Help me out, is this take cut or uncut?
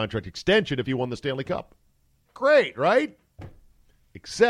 uncut